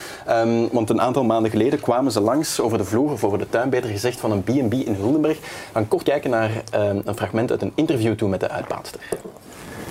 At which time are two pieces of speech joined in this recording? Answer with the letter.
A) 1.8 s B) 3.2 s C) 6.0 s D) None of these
C